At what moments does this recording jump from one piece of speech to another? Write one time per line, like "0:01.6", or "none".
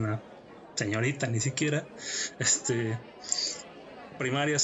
none